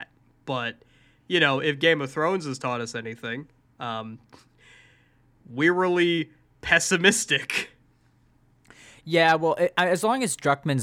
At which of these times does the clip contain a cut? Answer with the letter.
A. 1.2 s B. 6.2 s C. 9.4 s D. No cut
D